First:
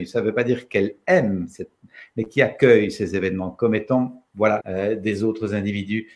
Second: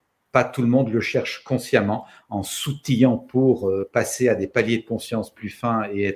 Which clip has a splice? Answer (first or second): first